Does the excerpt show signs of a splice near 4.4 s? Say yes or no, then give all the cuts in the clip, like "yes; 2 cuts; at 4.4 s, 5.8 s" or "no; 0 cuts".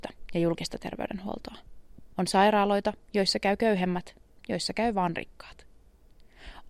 yes; 2 cuts; at 2.1 s, 4.4 s